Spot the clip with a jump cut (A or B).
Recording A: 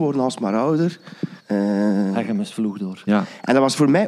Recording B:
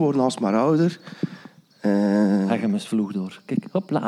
A